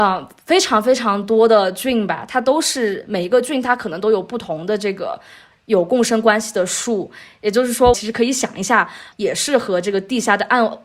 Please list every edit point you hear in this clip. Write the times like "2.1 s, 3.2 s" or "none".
7.9 s, 9.1 s